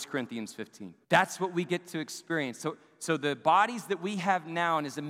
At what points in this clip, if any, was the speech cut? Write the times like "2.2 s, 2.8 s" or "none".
1.0 s